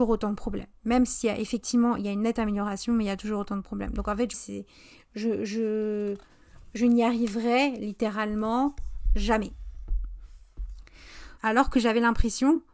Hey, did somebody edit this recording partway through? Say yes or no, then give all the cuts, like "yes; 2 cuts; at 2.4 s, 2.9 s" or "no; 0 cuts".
yes; 2 cuts; at 4.3 s, 11.4 s